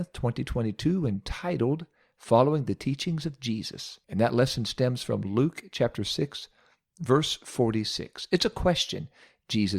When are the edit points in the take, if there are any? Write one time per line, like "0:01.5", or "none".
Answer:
0:04.0